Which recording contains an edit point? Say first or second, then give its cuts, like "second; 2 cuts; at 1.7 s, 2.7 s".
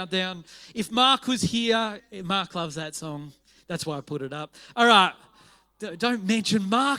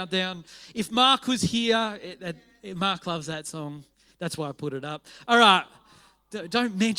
first; 1 cut; at 2.0 s